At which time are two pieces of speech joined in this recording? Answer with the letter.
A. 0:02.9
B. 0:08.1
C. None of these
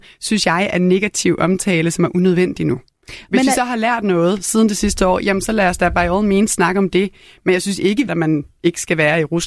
B